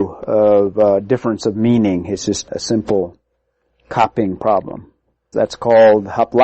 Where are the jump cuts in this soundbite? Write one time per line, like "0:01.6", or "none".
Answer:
0:05.3